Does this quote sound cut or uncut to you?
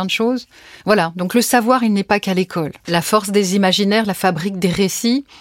uncut